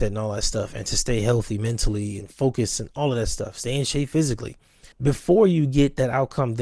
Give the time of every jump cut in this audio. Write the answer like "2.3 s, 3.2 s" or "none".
4.9 s